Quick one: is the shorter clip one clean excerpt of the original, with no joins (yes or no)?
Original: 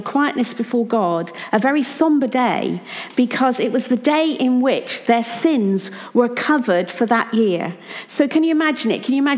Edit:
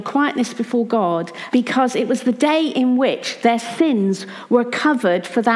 no